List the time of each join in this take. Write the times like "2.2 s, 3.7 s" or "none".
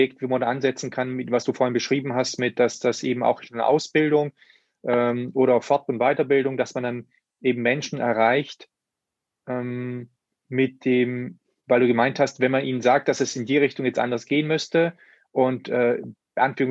none